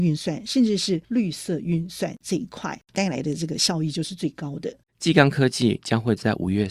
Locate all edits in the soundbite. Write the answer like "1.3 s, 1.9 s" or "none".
2.9 s, 4.8 s